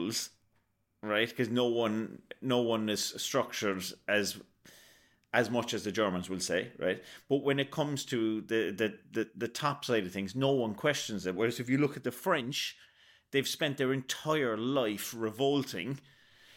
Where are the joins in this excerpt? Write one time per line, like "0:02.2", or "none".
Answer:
none